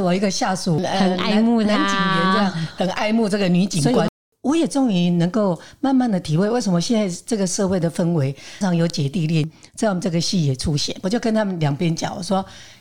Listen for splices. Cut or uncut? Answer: cut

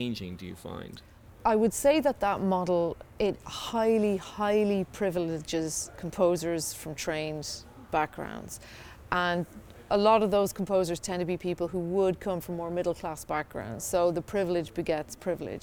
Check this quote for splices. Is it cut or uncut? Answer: uncut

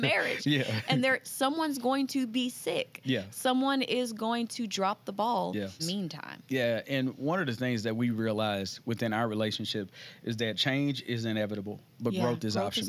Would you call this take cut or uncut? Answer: cut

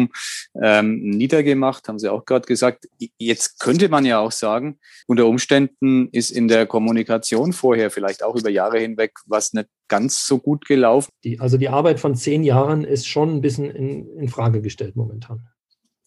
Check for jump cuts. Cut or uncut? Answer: cut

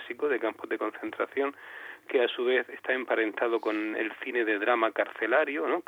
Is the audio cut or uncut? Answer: uncut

